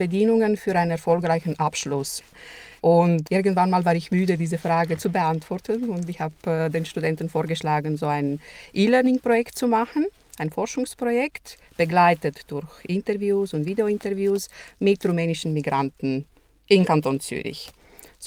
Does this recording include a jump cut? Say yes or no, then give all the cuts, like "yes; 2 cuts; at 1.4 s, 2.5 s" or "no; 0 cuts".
yes; 1 cut; at 2.8 s